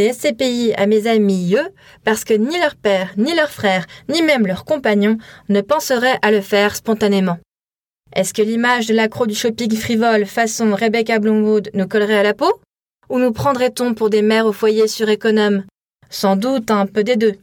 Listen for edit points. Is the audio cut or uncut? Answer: uncut